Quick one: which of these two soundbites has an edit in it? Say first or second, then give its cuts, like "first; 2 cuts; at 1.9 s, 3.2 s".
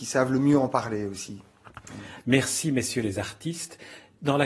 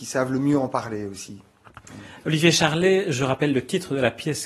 first; 1 cut; at 2.2 s